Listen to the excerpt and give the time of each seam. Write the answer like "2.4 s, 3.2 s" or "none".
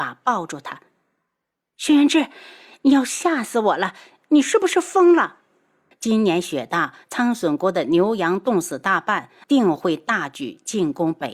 5.9 s, 9.4 s